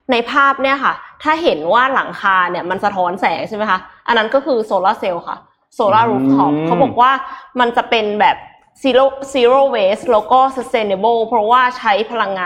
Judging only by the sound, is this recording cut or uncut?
uncut